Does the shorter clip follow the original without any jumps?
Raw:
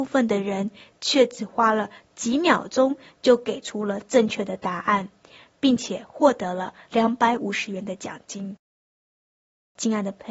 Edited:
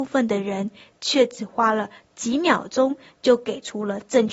yes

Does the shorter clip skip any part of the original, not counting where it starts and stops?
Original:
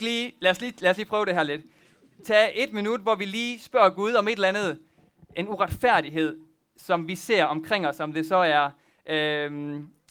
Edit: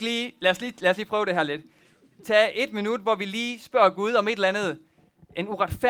no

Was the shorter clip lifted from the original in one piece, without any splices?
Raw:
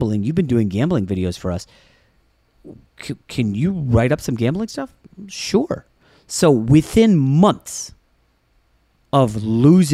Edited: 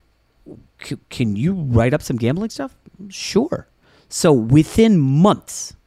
yes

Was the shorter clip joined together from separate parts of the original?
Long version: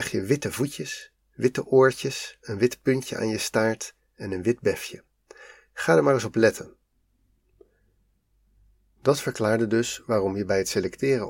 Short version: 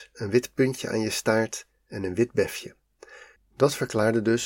yes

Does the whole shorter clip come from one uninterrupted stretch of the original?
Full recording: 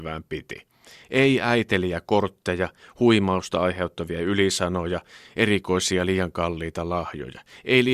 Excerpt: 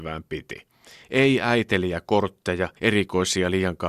no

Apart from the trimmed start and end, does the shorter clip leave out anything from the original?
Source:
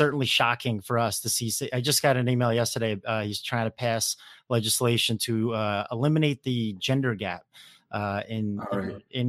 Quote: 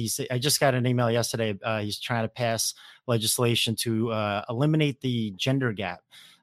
no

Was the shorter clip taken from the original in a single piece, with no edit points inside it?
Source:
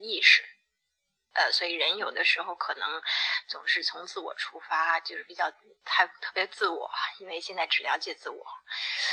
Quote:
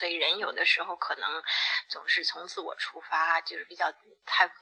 yes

